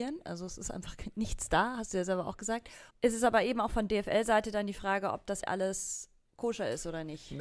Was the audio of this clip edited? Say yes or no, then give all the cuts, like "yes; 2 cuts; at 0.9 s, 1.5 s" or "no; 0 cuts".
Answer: yes; 2 cuts; at 2.9 s, 5.4 s